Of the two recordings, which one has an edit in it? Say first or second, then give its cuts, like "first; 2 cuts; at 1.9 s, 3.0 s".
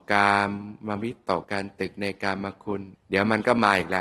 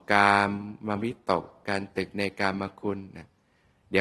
first; 2 cuts; at 1.4 s, 2.9 s